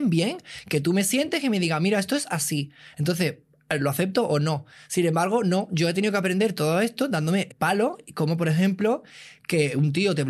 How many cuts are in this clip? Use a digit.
1